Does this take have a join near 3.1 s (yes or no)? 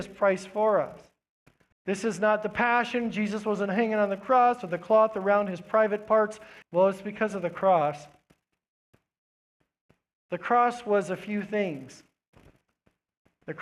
no